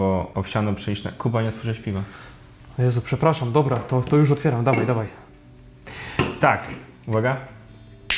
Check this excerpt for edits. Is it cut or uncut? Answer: uncut